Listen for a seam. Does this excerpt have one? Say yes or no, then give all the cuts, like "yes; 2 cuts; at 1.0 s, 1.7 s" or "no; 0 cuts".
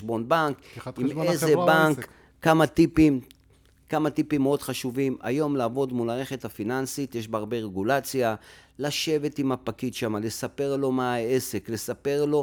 no; 0 cuts